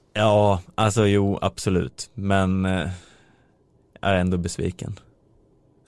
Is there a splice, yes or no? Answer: no